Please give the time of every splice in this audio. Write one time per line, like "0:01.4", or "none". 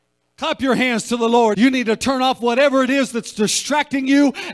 0:01.5